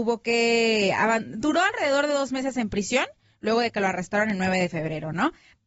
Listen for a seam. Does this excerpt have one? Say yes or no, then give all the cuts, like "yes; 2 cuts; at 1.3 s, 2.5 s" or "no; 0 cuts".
no; 0 cuts